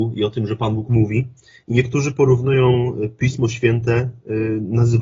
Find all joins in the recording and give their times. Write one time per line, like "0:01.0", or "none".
none